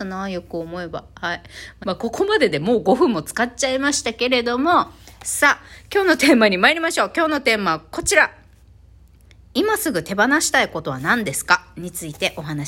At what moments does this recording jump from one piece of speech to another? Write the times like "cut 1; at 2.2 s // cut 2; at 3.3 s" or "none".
cut 1; at 1.8 s